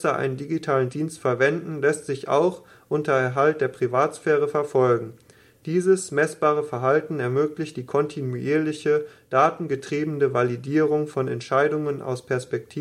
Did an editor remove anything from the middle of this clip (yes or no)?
no